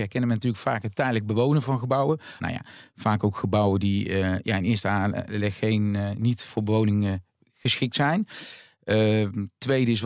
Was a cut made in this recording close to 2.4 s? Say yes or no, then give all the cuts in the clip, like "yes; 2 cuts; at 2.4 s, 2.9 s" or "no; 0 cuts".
yes; 1 cut; at 2.4 s